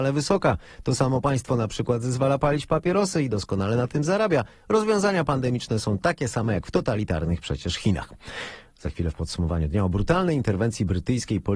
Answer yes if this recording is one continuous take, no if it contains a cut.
yes